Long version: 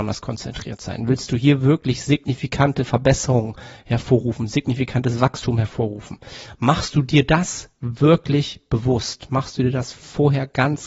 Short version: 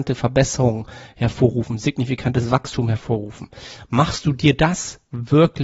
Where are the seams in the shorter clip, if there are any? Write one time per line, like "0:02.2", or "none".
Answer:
none